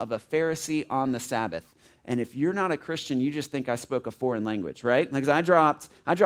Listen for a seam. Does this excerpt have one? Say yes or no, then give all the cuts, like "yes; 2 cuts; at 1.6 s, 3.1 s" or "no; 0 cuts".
no; 0 cuts